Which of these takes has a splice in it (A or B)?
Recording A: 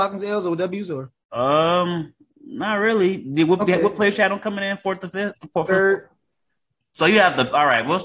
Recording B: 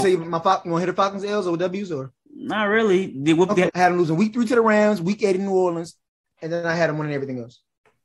B